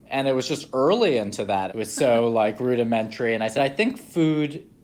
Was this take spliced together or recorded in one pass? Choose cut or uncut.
cut